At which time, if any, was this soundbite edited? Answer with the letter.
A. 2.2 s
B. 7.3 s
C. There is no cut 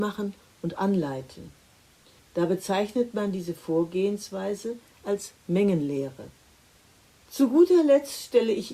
A